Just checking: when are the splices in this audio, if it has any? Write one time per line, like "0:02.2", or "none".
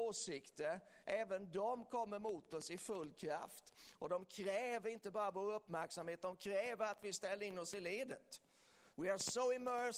0:08.9

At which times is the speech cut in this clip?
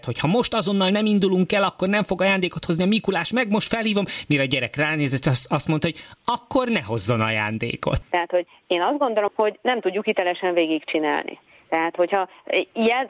0:08.0
0:09.3

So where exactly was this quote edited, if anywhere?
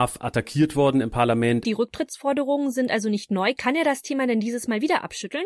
0:01.6

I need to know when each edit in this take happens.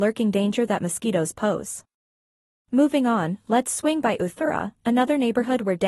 none

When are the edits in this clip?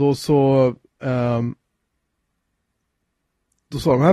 none

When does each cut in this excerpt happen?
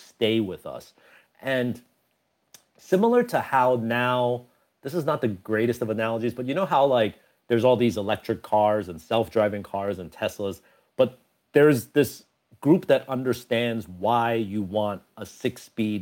none

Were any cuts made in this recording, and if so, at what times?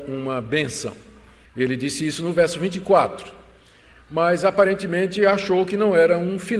0:01.4

